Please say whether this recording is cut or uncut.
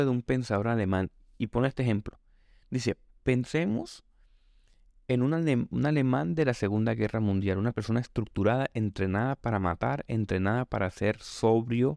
uncut